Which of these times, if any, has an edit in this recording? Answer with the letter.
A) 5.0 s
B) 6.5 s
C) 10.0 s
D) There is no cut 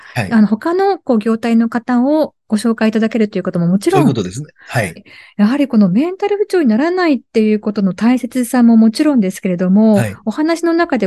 A